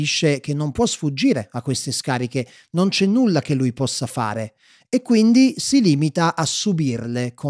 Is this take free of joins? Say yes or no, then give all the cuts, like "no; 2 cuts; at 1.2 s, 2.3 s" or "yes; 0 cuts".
yes; 0 cuts